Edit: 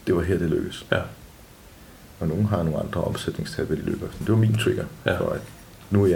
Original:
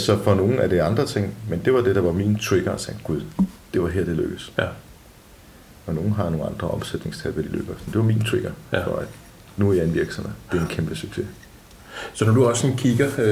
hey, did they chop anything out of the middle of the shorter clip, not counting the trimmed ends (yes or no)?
no